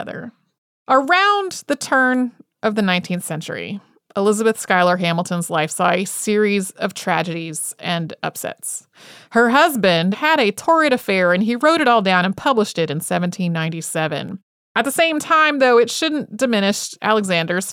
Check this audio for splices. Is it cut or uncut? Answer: cut